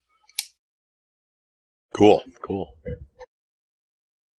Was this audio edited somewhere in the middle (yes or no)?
no